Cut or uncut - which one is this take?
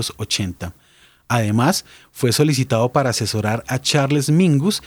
uncut